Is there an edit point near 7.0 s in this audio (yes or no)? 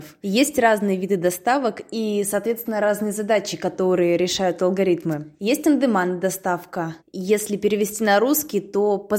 yes